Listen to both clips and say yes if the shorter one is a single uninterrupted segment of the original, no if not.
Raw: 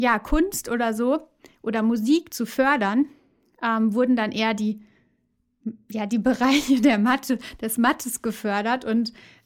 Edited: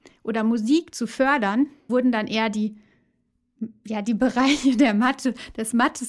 no